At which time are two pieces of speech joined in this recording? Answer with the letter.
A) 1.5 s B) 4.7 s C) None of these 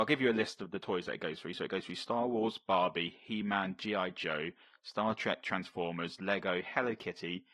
C